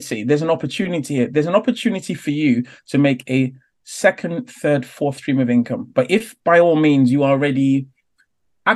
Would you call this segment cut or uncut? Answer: uncut